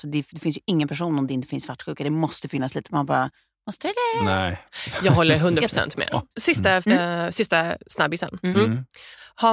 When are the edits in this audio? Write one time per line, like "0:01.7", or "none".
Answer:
0:06.8